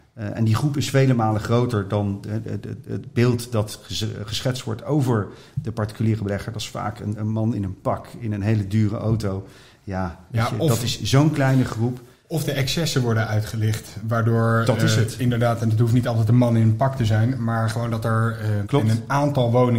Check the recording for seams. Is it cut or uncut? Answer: cut